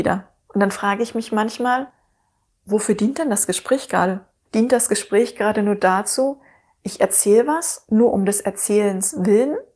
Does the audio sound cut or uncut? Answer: uncut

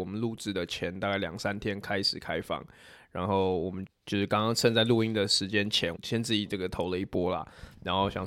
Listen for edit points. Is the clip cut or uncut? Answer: cut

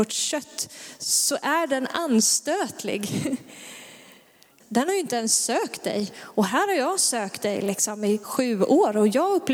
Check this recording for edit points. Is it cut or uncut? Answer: cut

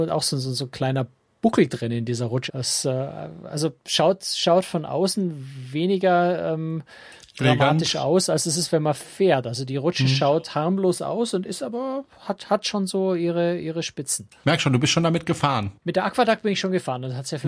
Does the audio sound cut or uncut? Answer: cut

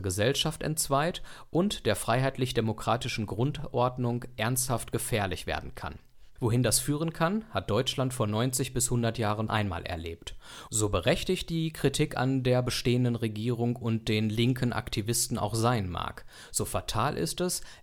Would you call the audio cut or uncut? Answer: cut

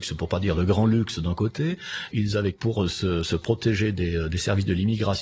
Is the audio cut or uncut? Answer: cut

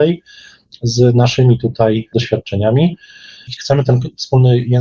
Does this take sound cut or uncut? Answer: cut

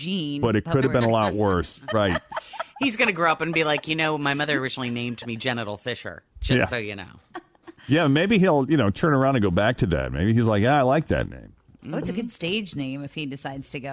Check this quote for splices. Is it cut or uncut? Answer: cut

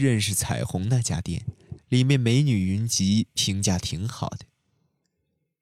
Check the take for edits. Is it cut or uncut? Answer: cut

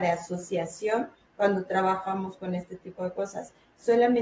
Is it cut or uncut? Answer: uncut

